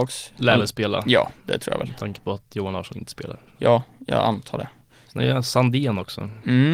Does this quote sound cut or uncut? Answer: uncut